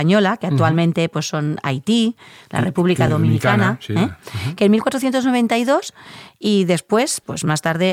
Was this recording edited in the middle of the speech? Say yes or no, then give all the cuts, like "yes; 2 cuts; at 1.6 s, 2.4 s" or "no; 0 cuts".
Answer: no; 0 cuts